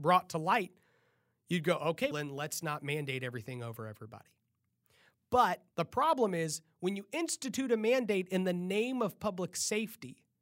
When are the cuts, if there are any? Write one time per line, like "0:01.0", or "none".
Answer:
0:02.1
0:05.7